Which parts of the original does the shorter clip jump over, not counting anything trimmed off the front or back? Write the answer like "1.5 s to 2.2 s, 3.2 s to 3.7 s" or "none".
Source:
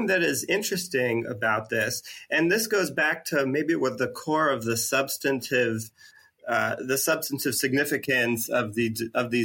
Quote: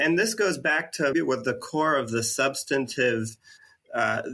3.5 s to 3.7 s